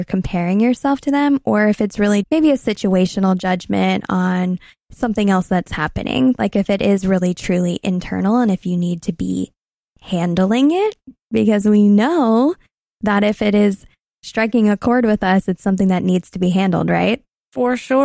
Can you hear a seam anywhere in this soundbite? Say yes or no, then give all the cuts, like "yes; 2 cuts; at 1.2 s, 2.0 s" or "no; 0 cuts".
yes; 1 cut; at 2.2 s